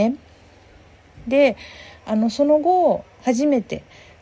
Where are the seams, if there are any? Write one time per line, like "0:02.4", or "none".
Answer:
0:03.2